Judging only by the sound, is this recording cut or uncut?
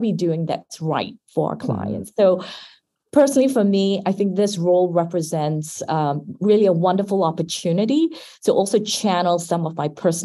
uncut